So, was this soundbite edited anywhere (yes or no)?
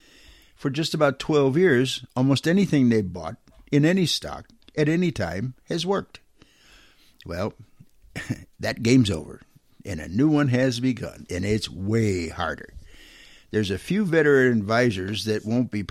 no